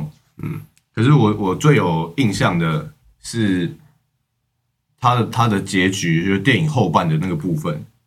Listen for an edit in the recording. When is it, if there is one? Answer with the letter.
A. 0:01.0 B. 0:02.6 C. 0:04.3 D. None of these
D